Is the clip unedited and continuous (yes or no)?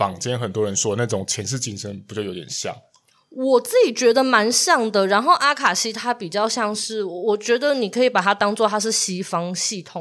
yes